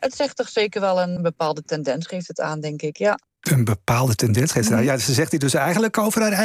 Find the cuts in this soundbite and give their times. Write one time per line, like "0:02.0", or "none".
0:01.2